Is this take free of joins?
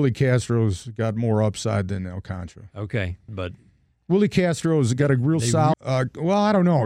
no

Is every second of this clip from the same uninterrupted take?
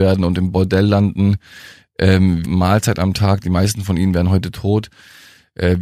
no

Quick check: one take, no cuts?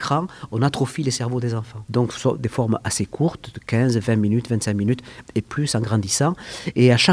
no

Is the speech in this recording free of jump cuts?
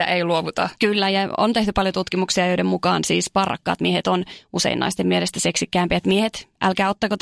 yes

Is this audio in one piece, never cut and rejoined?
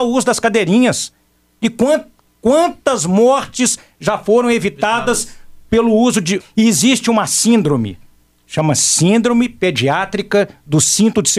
no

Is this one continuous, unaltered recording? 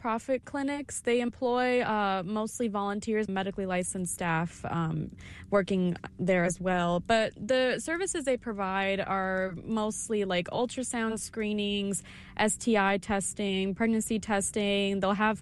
no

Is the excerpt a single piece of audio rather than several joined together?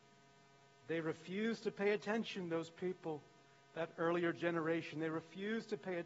yes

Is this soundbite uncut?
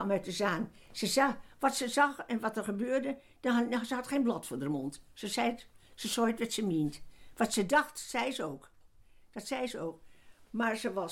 yes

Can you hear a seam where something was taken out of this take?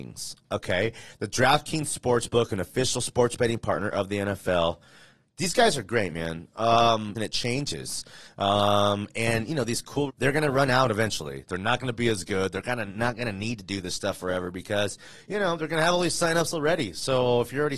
yes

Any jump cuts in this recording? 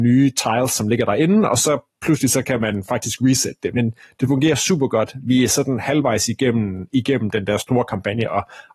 no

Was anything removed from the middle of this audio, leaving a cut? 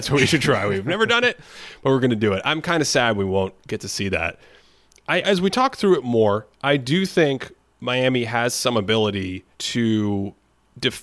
yes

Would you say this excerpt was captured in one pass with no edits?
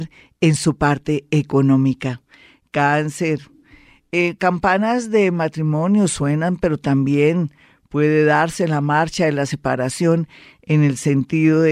yes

